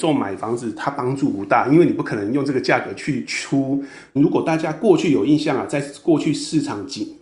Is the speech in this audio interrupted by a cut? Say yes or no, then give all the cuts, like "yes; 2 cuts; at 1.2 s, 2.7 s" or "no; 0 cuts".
yes; 1 cut; at 4.2 s